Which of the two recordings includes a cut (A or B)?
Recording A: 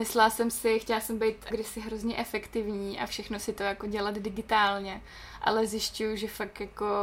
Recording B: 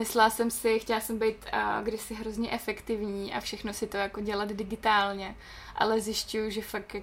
A